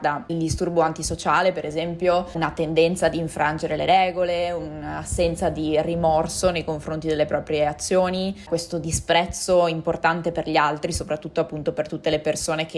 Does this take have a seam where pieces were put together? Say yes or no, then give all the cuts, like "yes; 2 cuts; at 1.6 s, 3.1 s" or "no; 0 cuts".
no; 0 cuts